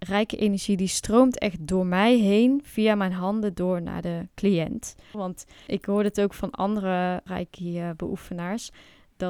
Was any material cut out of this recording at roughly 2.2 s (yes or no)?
no